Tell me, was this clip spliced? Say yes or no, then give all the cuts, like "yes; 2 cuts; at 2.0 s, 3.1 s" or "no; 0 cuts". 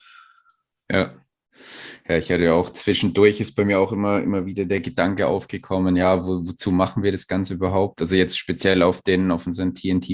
no; 0 cuts